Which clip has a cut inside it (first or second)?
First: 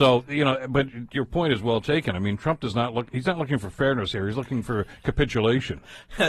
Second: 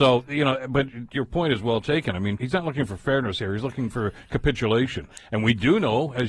second